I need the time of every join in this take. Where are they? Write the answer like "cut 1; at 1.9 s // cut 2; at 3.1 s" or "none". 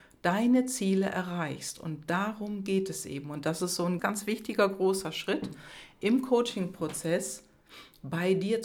cut 1; at 4.0 s